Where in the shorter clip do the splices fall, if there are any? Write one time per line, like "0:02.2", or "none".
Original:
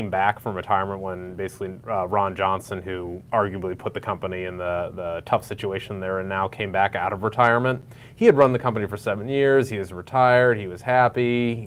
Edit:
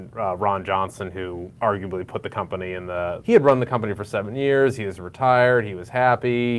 0:03.2